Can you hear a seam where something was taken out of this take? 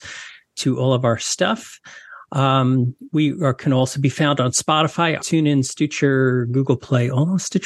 yes; 1 cut; at 5.2 s

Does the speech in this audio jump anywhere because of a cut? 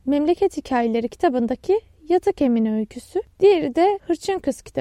no; 0 cuts

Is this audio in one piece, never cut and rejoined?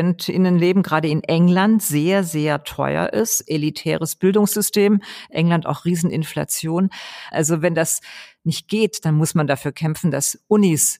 no; 1 cut; at 7.3 s

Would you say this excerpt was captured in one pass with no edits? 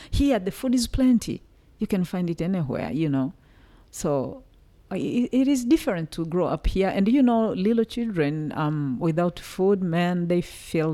yes; 0 cuts

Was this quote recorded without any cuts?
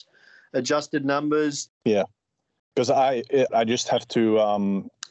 no; 2 cuts; at 1.7 s, 3.5 s

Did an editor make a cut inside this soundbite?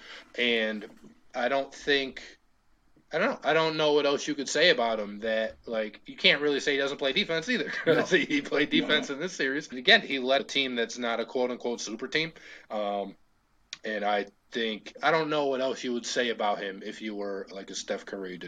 no; 0 cuts

